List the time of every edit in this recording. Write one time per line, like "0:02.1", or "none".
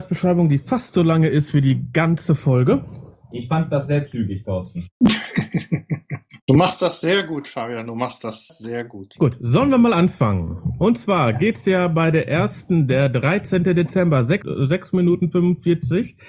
0:08.5